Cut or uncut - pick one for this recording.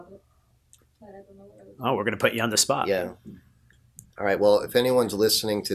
uncut